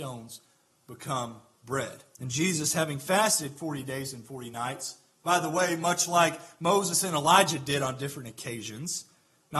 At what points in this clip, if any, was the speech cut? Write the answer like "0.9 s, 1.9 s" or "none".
2.1 s

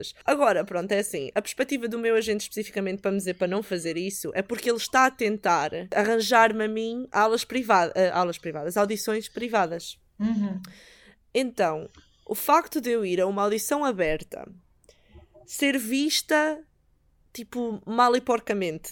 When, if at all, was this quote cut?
none

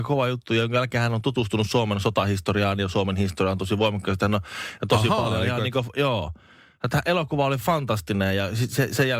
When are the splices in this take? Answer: none

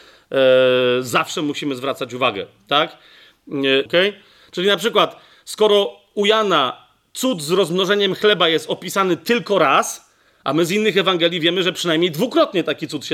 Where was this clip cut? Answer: 3.9 s

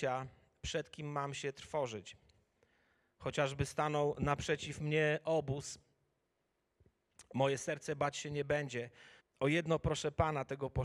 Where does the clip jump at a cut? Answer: 9.2 s

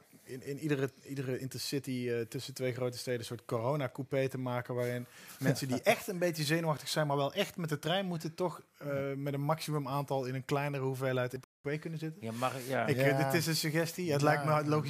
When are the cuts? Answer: none

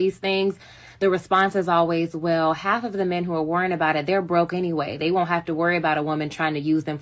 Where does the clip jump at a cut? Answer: none

